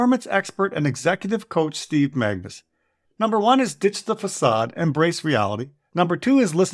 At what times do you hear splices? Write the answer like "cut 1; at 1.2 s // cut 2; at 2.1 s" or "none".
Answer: cut 1; at 3.1 s